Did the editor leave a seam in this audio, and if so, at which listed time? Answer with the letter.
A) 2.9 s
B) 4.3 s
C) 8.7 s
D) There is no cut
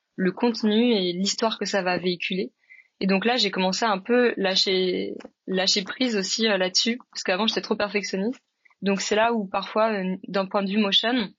C